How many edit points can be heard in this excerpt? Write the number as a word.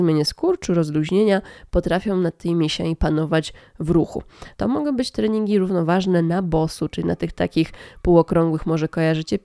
one